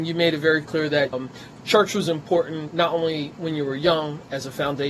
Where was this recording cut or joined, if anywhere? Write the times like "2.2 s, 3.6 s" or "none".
1.1 s